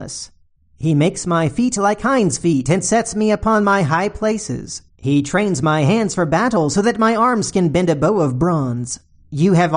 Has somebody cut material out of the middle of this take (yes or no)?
no